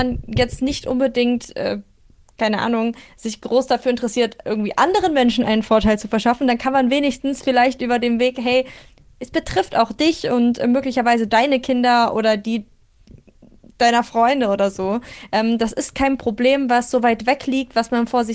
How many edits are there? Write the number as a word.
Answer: zero